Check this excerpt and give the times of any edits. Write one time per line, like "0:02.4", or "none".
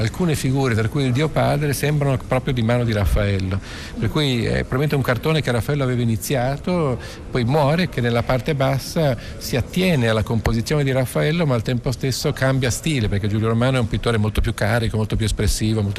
0:07.9